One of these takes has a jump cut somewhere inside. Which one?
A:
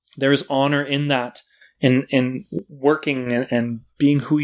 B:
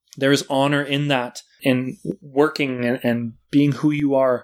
B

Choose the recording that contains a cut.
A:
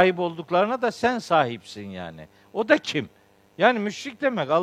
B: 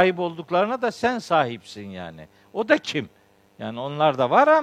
A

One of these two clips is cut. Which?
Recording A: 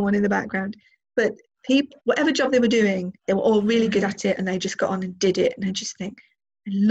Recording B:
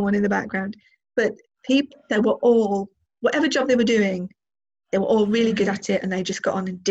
A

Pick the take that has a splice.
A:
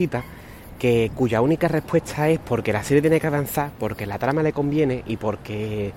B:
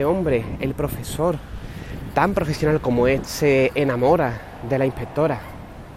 B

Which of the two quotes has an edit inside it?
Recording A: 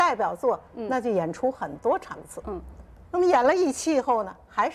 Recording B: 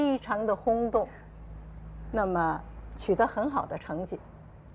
A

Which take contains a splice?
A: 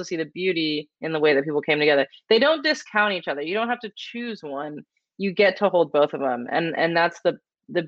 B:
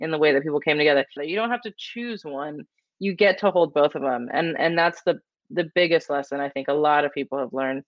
B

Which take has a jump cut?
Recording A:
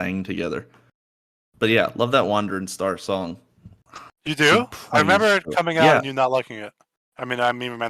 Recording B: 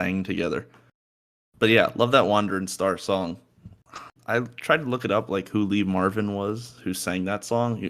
B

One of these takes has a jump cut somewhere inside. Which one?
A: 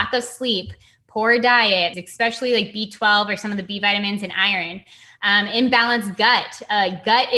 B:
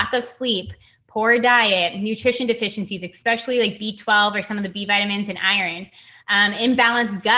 A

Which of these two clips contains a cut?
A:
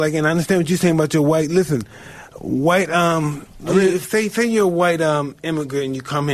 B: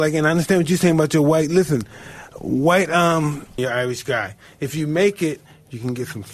B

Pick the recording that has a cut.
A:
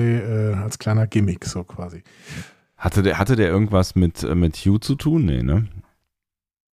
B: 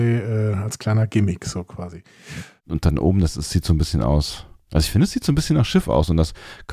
B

